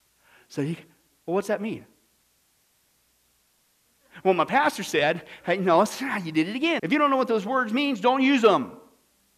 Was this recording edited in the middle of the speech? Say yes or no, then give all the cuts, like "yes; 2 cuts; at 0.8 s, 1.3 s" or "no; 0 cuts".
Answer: yes; 1 cut; at 6.8 s